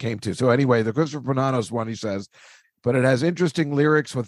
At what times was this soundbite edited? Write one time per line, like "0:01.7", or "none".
0:02.6